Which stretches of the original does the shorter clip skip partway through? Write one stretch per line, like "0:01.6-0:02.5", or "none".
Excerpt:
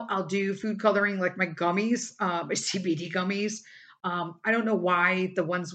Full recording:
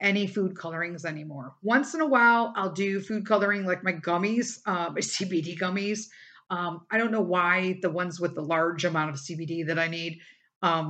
none